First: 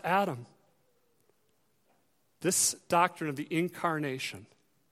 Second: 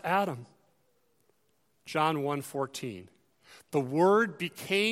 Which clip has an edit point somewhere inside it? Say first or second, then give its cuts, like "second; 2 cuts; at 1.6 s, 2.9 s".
second; 1 cut; at 1.8 s